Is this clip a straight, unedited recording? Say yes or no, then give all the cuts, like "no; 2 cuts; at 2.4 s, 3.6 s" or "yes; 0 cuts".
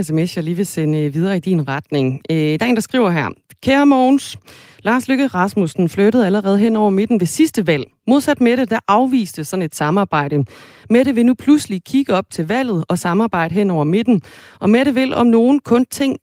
yes; 0 cuts